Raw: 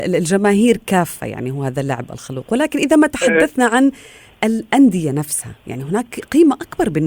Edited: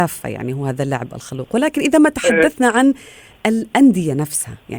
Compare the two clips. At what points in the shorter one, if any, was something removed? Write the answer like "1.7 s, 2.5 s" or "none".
none